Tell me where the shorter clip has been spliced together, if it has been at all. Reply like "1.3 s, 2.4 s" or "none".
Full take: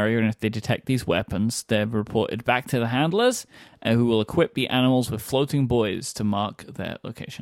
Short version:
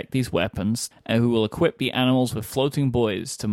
0.9 s